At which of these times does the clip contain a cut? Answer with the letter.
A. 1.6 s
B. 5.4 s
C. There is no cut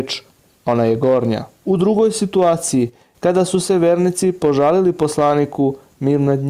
A